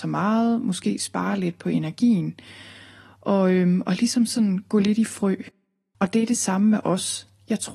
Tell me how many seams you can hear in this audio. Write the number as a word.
one